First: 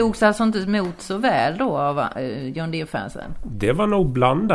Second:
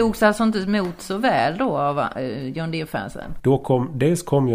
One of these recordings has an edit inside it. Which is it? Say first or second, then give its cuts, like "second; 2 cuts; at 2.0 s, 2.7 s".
second; 1 cut; at 3.4 s